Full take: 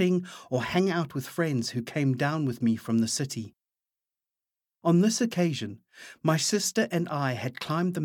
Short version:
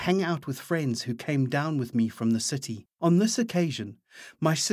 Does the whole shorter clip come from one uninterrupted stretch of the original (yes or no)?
no